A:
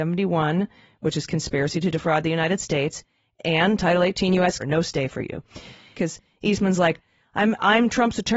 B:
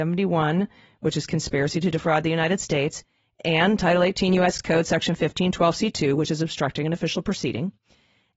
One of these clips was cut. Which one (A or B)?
A